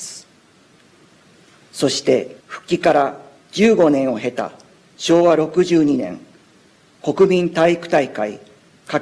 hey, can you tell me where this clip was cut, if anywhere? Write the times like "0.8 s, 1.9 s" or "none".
2.4 s